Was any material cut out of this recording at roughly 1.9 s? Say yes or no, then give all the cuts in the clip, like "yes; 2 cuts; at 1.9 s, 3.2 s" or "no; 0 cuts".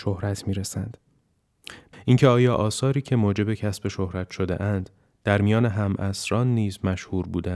yes; 1 cut; at 1.9 s